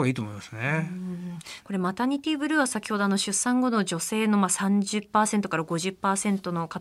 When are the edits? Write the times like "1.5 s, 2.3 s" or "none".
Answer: 1.6 s